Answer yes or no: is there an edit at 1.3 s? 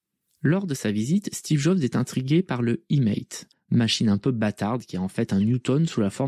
no